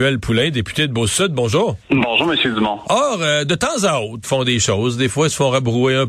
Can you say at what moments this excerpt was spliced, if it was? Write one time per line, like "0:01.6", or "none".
0:01.8
0:02.8
0:04.2